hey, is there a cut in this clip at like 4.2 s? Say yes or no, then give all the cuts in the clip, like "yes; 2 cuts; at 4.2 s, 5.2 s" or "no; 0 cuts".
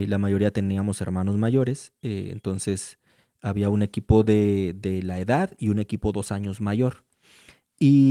no; 0 cuts